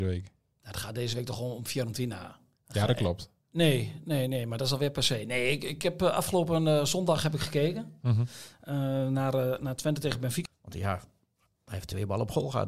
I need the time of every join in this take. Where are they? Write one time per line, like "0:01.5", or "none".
0:03.4
0:10.5